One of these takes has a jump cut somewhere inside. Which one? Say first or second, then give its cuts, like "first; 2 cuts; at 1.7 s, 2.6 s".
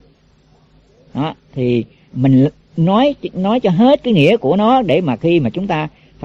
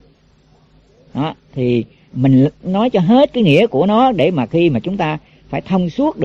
second; 1 cut; at 2.6 s